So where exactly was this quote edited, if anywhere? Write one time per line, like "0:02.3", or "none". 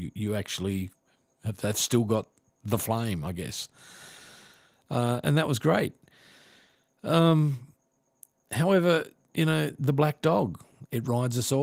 none